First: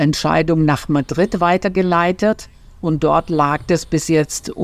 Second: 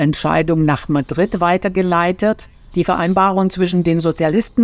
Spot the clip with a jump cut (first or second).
second